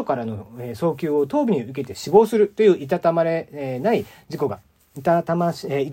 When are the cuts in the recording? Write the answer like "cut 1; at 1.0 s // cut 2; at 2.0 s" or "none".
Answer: none